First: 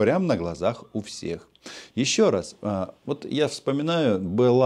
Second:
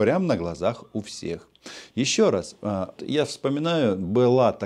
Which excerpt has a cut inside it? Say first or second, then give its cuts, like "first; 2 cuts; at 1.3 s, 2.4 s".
second; 1 cut; at 3.0 s